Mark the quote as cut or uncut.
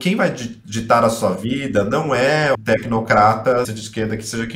cut